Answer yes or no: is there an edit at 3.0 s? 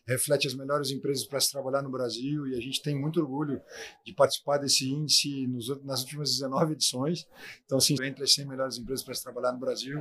no